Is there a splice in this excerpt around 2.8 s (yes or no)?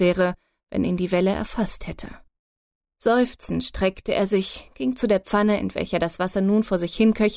yes